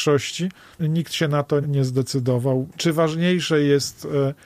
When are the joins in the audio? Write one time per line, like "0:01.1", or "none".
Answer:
0:01.6
0:02.7